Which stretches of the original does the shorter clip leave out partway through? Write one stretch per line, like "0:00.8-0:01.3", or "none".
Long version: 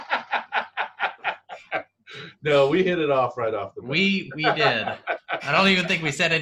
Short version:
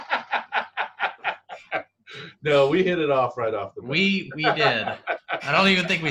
none